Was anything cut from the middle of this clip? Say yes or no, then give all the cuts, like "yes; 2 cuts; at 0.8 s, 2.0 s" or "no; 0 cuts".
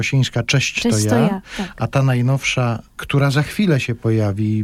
no; 0 cuts